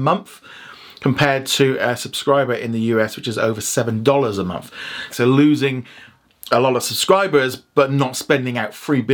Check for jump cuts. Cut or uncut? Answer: cut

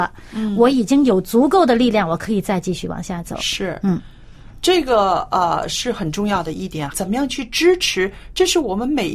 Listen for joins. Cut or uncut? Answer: cut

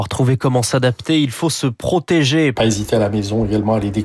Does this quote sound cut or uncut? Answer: cut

